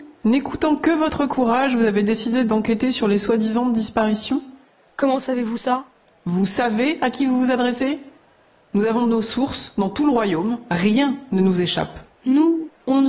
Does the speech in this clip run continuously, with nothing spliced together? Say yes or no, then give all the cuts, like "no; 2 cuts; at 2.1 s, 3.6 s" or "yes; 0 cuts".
yes; 0 cuts